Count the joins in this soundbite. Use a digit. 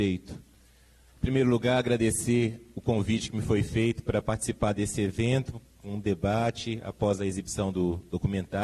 1